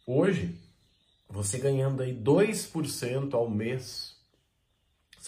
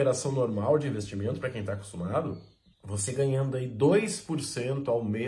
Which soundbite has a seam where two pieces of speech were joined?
second; 1 cut; at 2.7 s

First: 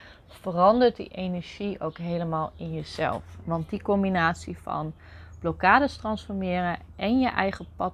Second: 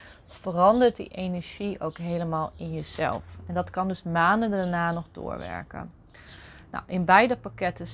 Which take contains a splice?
first; 1 cut; at 3.4 s

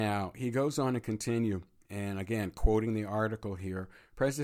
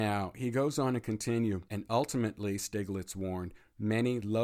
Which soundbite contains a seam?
second; 1 cut; at 1.7 s

